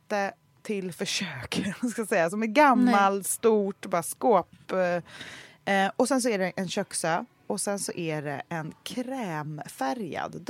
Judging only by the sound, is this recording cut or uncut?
uncut